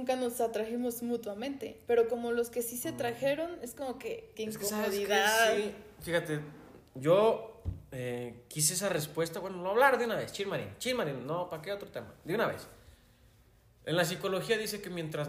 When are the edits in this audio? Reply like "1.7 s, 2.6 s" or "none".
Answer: 4.3 s